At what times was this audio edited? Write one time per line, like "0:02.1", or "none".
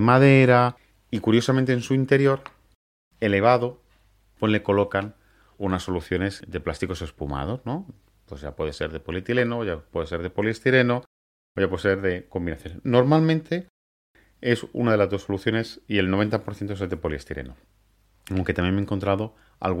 none